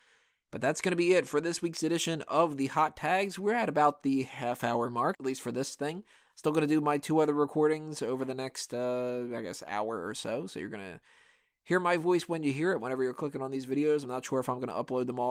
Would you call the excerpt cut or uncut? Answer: cut